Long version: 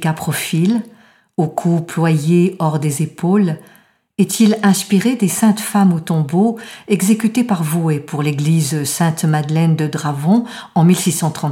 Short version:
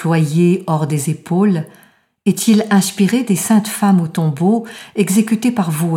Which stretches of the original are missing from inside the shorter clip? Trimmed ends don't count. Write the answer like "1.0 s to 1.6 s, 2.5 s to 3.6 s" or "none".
none